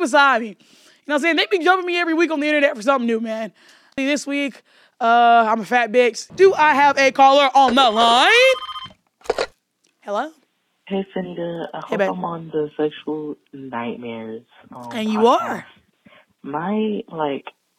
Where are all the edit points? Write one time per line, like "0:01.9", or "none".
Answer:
0:04.0
0:06.3

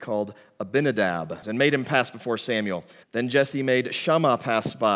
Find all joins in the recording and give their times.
0:01.4
0:03.0

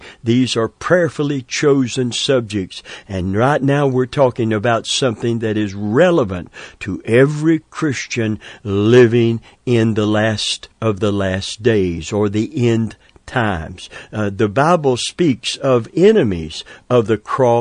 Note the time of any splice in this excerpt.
0:10.7

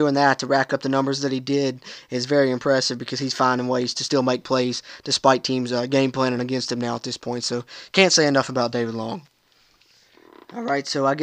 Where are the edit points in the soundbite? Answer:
none

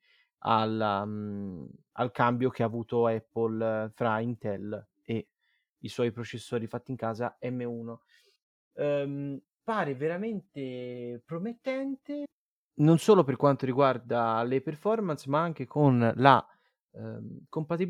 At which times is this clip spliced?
0:08.7

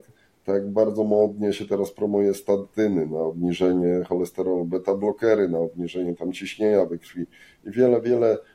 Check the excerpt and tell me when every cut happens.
none

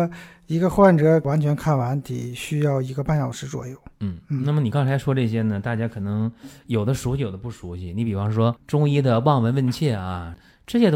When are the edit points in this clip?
none

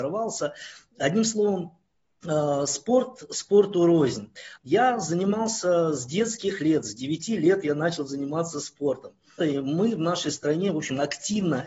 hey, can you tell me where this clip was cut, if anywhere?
0:04.6
0:09.4

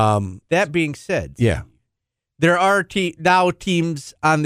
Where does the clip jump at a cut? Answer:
none

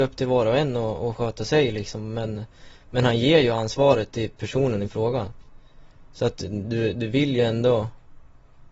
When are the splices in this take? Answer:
none

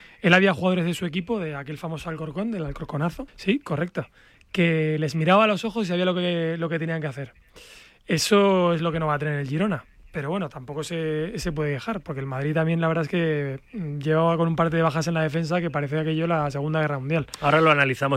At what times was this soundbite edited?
0:03.3

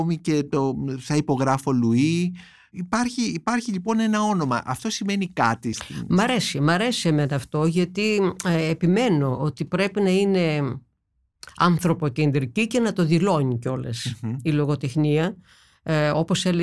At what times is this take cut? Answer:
0:05.7

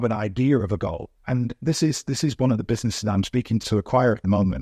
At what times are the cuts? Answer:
0:01.2
0:03.6

